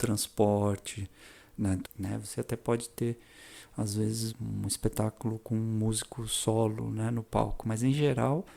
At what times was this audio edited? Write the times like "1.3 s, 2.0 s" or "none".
1.8 s, 4.3 s